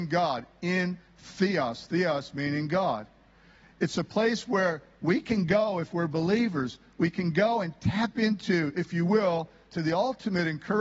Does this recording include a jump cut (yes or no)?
no